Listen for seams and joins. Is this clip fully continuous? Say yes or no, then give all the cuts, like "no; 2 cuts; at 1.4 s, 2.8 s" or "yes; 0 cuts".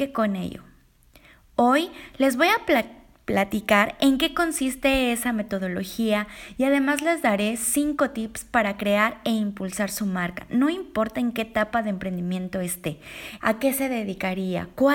no; 1 cut; at 13.4 s